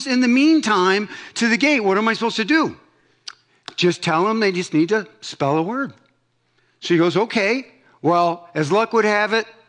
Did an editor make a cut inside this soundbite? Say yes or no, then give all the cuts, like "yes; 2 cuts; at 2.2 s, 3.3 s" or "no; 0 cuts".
no; 0 cuts